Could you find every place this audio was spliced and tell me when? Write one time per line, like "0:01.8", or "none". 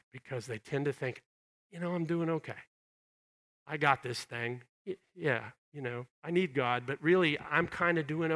none